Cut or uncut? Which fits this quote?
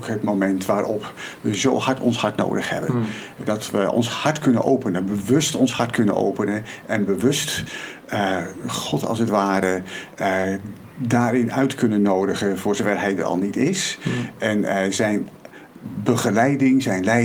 uncut